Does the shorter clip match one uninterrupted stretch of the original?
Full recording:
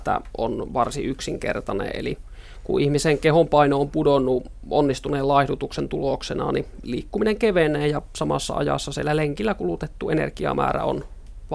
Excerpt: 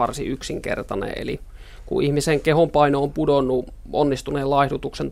yes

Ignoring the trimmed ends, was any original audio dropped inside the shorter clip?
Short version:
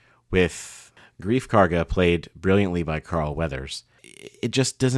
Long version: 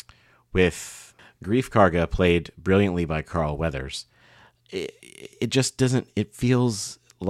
yes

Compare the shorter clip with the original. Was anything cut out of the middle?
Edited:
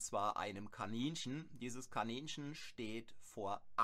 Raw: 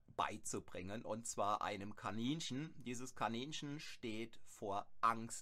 no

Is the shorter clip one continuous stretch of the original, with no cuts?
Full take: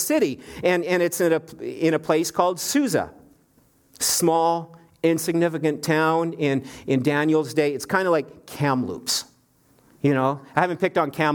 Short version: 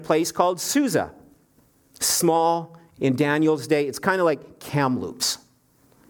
no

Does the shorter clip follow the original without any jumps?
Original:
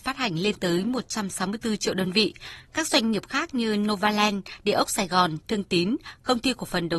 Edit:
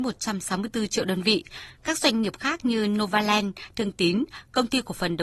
no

